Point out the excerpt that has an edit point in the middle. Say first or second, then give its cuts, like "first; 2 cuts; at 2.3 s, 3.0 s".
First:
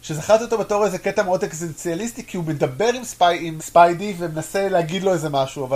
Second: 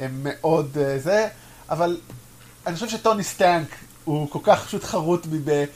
first; 1 cut; at 3.6 s